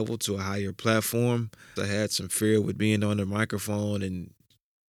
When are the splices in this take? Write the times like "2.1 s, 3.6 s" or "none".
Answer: 1.8 s